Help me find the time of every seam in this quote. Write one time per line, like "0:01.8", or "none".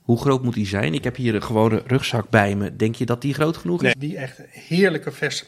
0:03.9